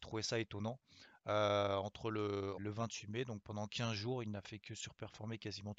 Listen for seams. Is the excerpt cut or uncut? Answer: cut